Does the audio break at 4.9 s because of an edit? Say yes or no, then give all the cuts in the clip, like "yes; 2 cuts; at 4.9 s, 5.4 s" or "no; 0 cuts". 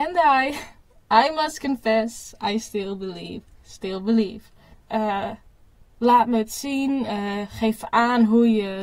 yes; 1 cut; at 4.9 s